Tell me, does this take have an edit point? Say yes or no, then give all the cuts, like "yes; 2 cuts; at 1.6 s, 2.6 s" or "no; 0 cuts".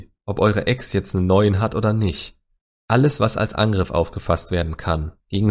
no; 0 cuts